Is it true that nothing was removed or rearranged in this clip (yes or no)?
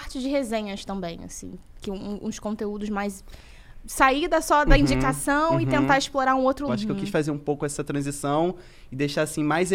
no